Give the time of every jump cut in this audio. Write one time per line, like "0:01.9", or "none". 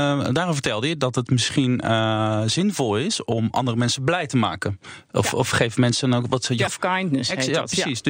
0:06.7